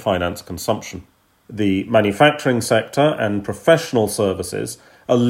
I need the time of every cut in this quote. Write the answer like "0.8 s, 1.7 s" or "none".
1.5 s